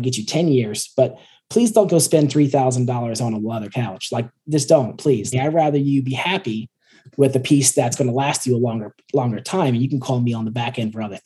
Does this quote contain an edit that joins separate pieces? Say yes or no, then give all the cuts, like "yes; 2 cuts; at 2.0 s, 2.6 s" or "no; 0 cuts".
yes; 1 cut; at 5.3 s